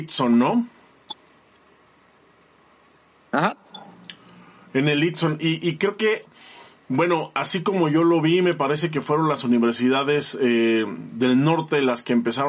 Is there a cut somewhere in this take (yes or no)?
no